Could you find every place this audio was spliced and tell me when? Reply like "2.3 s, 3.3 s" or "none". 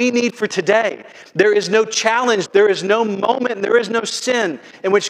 2.5 s